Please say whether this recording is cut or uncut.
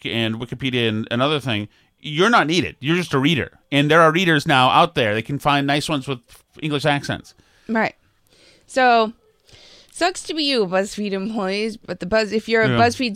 uncut